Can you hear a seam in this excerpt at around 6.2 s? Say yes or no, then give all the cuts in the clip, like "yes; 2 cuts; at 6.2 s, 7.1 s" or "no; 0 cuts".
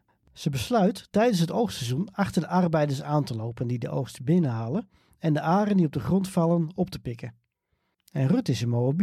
no; 1 cut; at 7.9 s